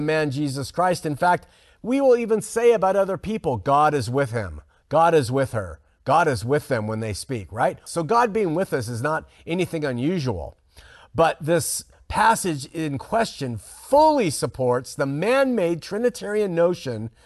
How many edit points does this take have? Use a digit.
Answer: 1